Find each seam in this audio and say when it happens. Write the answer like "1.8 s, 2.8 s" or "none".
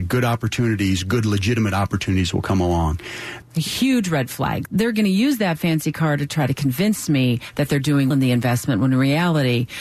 3.4 s, 4.7 s, 8.1 s